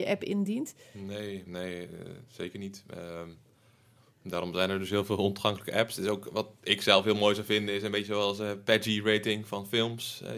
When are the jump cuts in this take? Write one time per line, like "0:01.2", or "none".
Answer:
none